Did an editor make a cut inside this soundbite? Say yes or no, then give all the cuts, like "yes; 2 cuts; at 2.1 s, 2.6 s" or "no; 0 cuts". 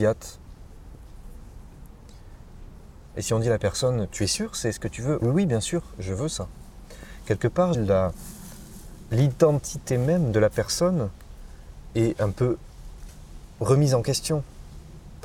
yes; 3 cuts; at 3.1 s, 5.2 s, 7.7 s